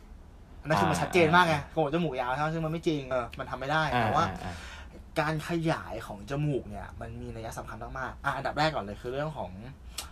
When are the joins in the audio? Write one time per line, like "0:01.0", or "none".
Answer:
0:03.1